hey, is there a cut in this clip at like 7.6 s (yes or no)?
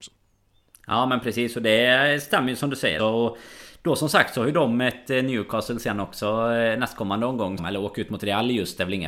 yes